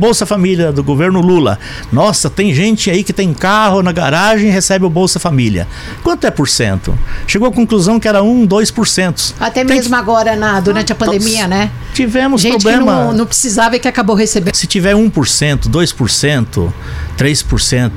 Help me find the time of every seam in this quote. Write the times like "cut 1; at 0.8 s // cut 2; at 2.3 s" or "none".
cut 1; at 14.5 s